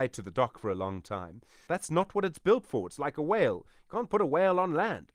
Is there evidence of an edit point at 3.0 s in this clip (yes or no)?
no